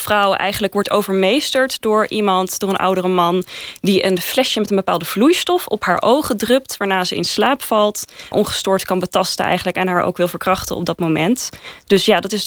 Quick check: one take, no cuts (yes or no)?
no